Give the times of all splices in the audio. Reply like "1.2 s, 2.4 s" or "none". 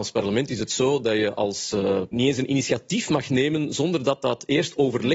2.1 s